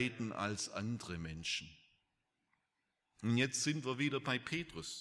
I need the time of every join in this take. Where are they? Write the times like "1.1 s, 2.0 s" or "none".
none